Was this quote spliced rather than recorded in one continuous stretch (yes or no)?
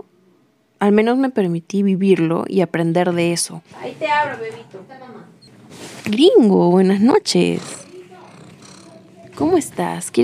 yes